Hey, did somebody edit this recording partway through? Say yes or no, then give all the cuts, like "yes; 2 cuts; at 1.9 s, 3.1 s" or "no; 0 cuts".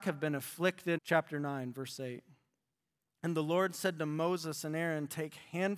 yes; 1 cut; at 1.0 s